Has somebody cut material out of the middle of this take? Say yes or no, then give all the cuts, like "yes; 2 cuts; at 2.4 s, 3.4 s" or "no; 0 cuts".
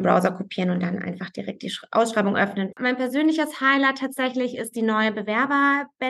yes; 1 cut; at 2.7 s